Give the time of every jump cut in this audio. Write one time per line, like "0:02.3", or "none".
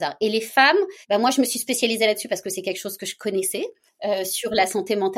0:01.0
0:03.9